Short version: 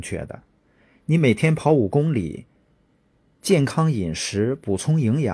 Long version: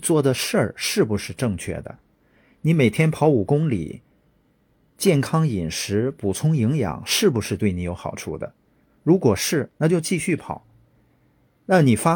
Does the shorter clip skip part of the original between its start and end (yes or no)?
no